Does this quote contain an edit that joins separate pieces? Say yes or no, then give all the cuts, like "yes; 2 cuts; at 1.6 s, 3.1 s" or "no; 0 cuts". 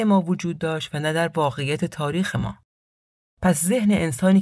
no; 0 cuts